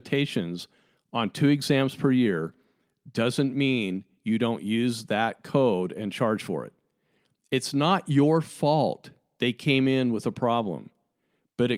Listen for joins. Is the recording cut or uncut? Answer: uncut